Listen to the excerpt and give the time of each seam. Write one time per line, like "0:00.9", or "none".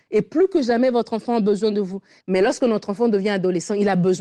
0:02.2